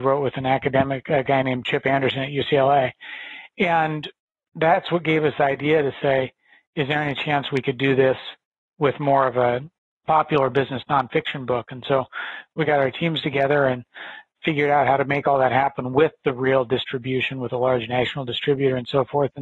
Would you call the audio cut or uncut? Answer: uncut